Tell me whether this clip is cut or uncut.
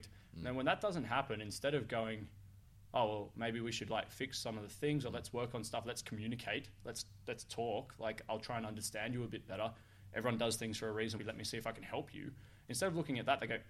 cut